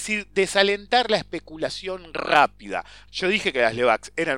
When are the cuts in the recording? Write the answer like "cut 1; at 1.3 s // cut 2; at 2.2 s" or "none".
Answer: cut 1; at 3.1 s